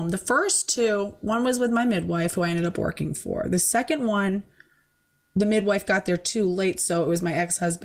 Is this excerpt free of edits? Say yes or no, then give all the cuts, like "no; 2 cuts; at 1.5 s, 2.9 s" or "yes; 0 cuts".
yes; 0 cuts